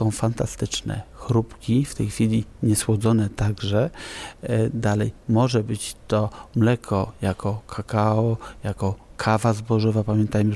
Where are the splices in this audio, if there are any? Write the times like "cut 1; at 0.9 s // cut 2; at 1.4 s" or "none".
none

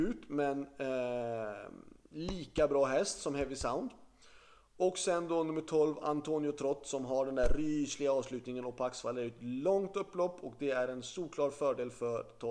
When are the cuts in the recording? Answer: none

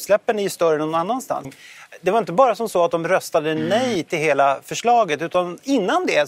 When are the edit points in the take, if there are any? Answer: cut 1; at 1.4 s

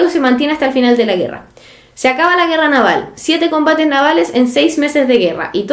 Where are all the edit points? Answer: none

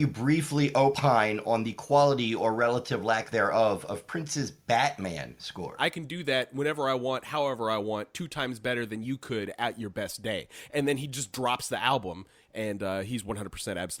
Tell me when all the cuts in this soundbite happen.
cut 1; at 5.8 s

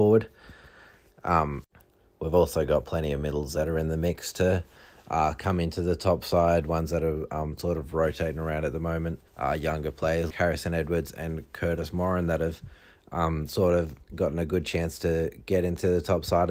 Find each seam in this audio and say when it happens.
cut 1; at 9.3 s // cut 2; at 10.3 s

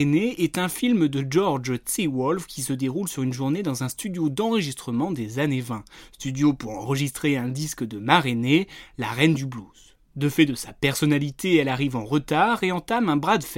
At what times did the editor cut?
none

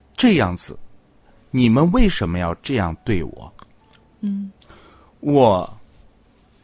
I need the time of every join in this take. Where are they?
none

